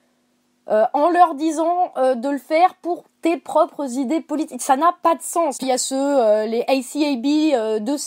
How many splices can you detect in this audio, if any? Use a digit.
1